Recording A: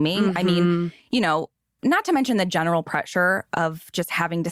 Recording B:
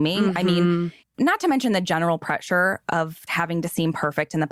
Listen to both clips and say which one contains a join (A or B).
B